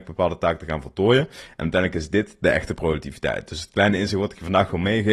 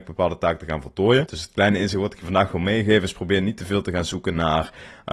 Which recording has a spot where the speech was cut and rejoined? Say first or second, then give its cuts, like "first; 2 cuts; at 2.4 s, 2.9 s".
second; 1 cut; at 1.3 s